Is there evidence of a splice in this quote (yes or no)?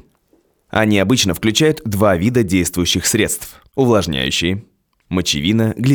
yes